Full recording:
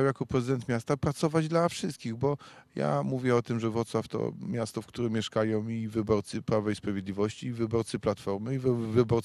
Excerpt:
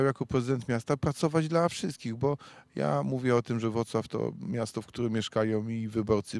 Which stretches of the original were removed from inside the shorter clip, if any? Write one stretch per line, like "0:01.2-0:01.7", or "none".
none